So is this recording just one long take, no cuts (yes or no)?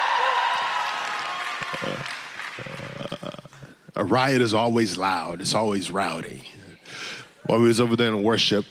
yes